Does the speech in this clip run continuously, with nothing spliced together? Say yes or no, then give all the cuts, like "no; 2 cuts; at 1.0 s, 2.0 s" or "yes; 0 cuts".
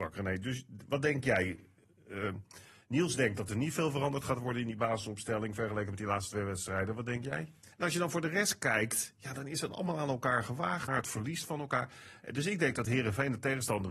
no; 2 cuts; at 7.7 s, 10.9 s